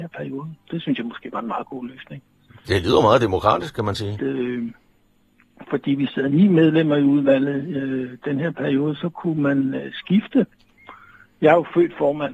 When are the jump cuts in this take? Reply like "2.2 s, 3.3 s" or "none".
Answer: 4.2 s